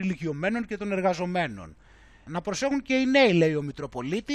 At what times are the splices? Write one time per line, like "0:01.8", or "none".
0:02.3